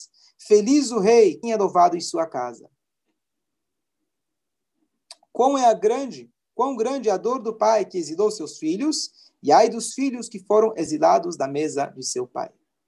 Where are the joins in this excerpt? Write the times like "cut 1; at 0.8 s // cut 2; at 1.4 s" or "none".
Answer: cut 1; at 1.4 s

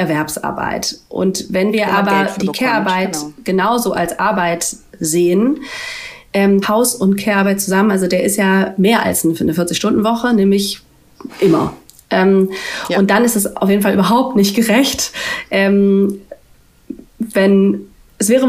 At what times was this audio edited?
cut 1; at 6.6 s

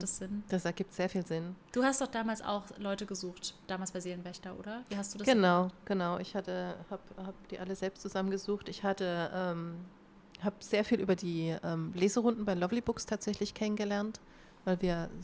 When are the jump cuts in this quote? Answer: cut 1; at 1.7 s

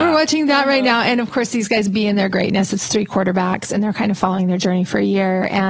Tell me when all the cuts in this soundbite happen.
none

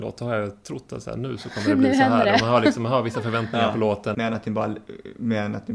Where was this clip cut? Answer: cut 1; at 4.1 s

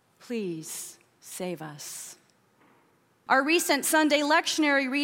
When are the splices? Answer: cut 1; at 3.3 s

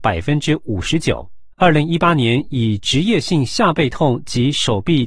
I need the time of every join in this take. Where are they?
cut 1; at 1.5 s

